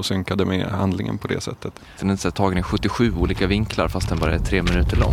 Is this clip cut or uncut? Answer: cut